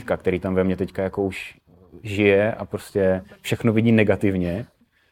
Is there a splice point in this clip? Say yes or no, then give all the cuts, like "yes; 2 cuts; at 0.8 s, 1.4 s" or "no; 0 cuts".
no; 0 cuts